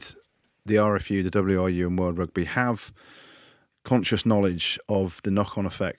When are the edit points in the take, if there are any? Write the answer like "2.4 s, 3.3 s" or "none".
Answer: none

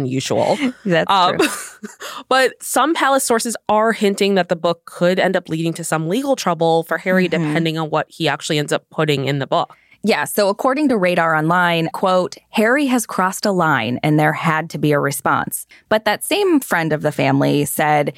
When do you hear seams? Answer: 11.9 s, 15.7 s

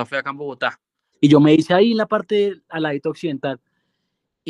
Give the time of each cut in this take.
1.1 s

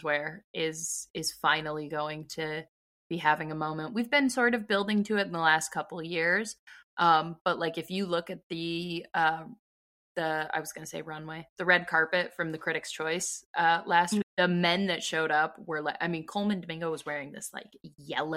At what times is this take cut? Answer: 14.2 s

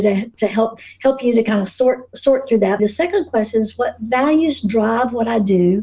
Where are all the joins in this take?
2.8 s

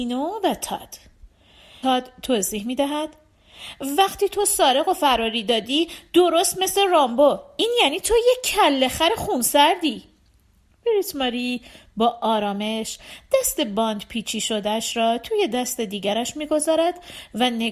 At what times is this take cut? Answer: 1.8 s

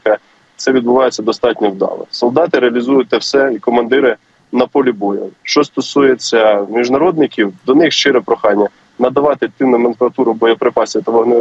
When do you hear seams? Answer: 5.3 s

